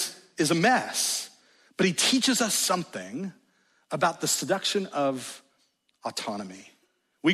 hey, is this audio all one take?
yes; 0 cuts

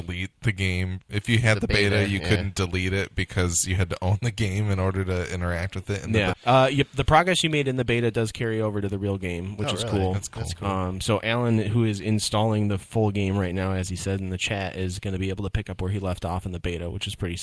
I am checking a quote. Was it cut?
yes; 1 cut; at 6.3 s

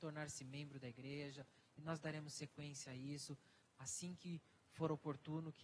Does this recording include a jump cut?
no; 0 cuts

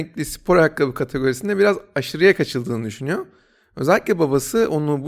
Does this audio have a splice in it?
no; 0 cuts

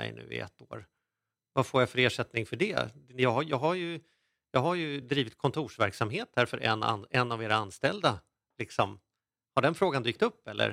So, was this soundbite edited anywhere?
no; 0 cuts

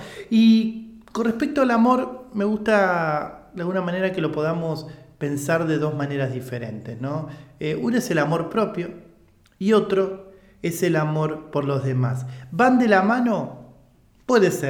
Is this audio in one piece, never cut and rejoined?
yes; 0 cuts

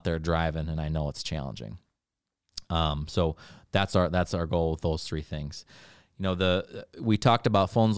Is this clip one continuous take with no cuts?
yes; 0 cuts

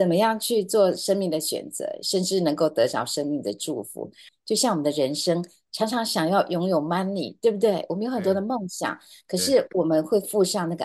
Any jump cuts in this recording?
yes; 1 cut; at 4.3 s

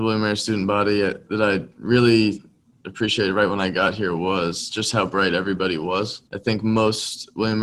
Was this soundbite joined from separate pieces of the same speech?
yes; 1 cut; at 6.3 s

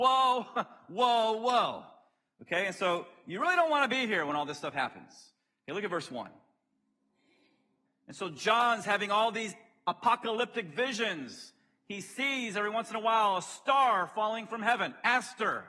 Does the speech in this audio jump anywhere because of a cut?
yes; 1 cut; at 7.9 s

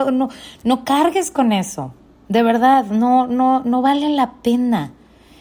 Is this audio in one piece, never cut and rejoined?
yes; 0 cuts

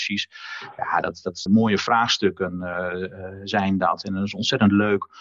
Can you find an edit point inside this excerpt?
yes; 1 cut; at 1.5 s

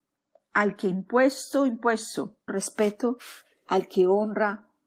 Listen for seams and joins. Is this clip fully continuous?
no; 1 cut; at 2.5 s

